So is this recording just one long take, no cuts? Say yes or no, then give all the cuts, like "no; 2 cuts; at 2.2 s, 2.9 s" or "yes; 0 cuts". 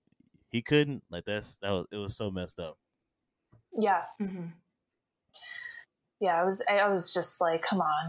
yes; 0 cuts